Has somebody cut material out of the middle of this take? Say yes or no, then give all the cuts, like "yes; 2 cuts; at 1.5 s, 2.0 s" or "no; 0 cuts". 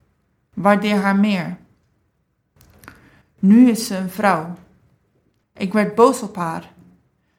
yes; 2 cuts; at 3.2 s, 5.4 s